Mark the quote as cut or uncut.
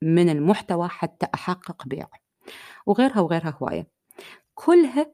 uncut